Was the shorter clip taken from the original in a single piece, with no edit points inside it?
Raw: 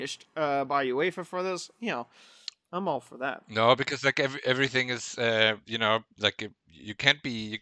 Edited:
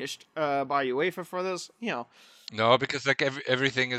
no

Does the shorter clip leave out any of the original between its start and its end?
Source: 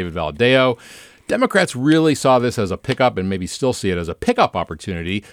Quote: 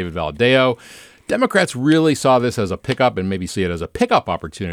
yes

